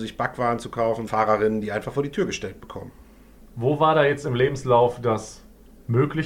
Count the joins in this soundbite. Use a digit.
2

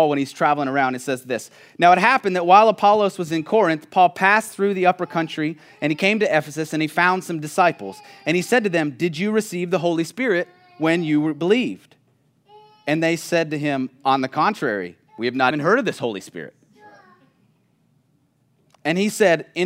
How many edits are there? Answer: 1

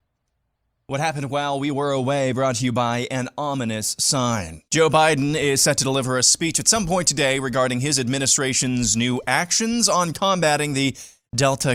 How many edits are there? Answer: 0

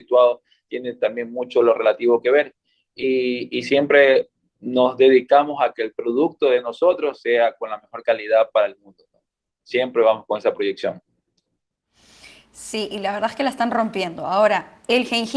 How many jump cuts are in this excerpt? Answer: 0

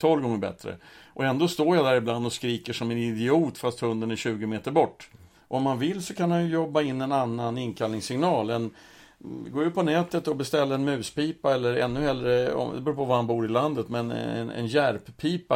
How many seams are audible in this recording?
1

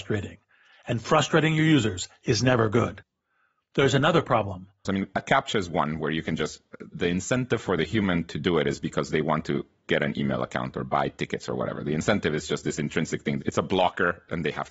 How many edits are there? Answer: 1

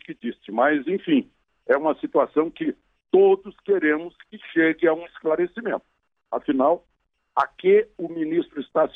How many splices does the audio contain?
0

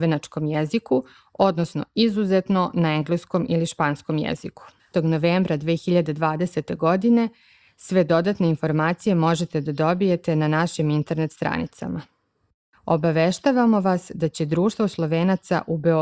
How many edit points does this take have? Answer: 1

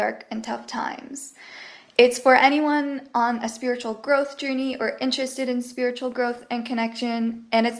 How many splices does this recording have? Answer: 0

